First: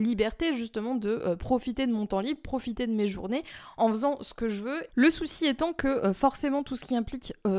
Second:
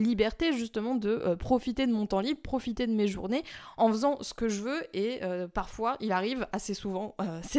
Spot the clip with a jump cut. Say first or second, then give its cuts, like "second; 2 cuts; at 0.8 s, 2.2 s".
first; 1 cut; at 4.9 s